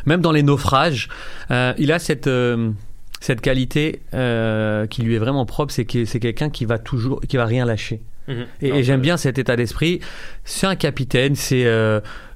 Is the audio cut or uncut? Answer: uncut